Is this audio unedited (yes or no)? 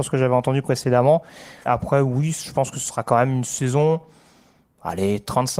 no